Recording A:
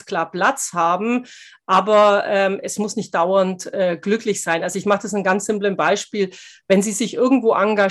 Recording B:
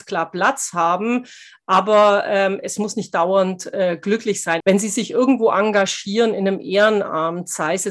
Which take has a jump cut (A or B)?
B